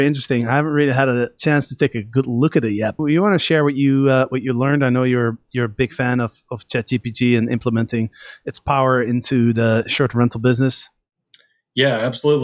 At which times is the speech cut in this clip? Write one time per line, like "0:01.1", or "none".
0:03.0